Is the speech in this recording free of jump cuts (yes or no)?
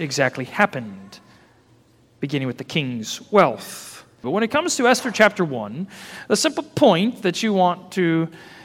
no